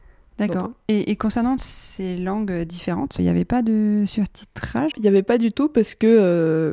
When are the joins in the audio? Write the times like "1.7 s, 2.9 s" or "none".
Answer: 3.2 s, 4.9 s